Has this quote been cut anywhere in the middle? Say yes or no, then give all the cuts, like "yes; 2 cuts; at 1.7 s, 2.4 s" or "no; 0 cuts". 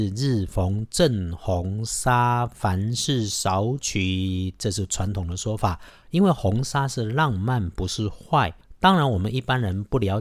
no; 0 cuts